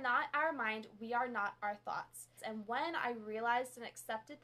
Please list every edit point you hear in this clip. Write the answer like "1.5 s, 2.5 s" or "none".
2.4 s